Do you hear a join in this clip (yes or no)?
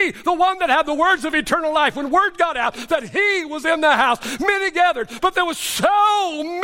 yes